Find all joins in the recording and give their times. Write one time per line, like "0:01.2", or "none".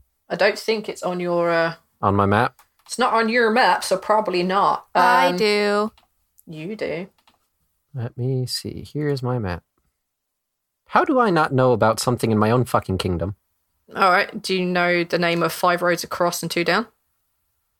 none